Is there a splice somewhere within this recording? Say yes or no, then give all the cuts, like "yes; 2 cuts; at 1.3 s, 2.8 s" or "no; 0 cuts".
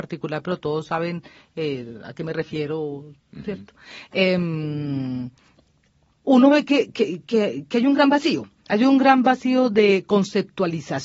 no; 0 cuts